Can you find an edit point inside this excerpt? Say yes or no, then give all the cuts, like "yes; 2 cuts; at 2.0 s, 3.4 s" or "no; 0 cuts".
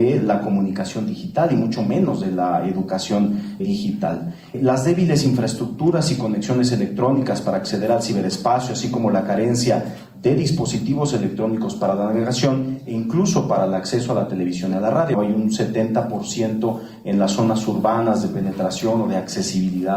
yes; 1 cut; at 3.6 s